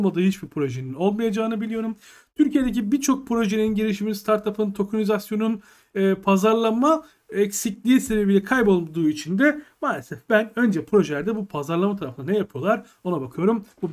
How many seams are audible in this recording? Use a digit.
0